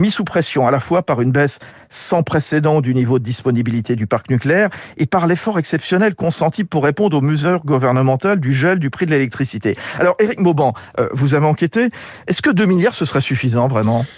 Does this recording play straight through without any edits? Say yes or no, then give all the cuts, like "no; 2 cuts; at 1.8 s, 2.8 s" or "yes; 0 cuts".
yes; 0 cuts